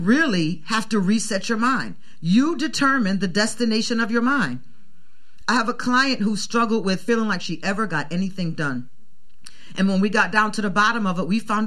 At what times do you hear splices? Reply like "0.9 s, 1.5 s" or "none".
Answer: none